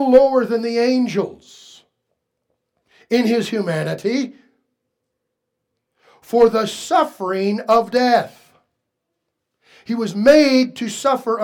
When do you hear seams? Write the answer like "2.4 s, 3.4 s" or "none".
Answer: none